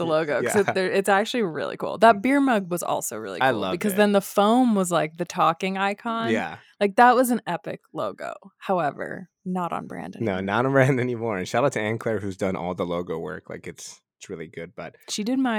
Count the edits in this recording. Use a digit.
0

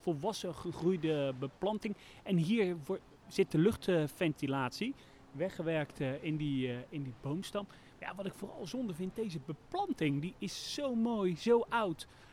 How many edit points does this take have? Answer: 0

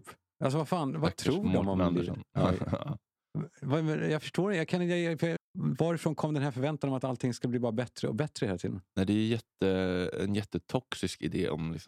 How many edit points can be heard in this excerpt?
1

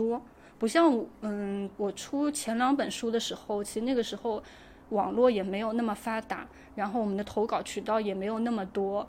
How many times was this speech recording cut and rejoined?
1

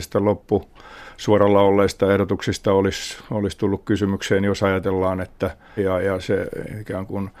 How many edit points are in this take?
1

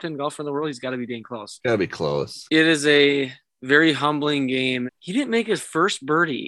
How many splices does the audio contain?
2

